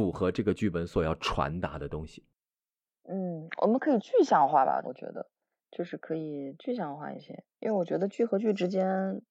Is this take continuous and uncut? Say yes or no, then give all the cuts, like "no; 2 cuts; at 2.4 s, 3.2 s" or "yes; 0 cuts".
no; 2 cuts; at 4.8 s, 7.5 s